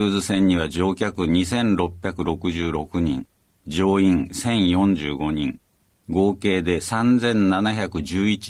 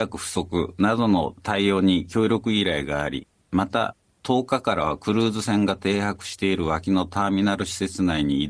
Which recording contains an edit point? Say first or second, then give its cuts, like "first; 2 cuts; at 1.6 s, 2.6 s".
second; 1 cut; at 3.5 s